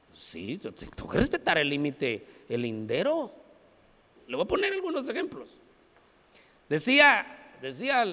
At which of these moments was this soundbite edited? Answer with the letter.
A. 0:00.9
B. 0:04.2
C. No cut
B